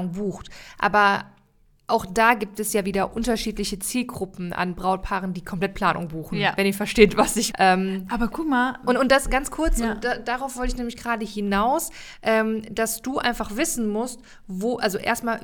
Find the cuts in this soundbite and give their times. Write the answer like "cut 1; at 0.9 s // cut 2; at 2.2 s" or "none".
cut 1; at 7.5 s